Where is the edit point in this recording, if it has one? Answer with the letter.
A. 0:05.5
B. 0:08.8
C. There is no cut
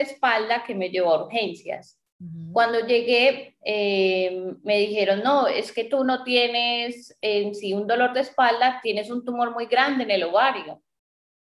B